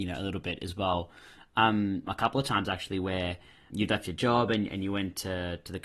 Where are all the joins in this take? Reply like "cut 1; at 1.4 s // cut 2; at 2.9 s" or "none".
cut 1; at 2.1 s // cut 2; at 3.7 s